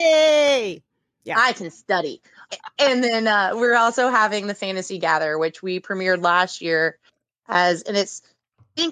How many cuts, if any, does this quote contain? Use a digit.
1